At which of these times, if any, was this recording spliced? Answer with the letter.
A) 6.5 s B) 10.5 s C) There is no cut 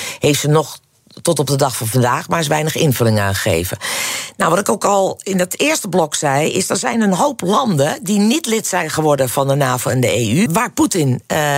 B